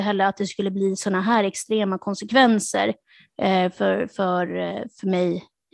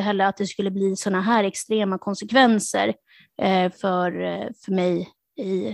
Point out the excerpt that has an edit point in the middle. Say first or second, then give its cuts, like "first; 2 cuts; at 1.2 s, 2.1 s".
second; 1 cut; at 3.7 s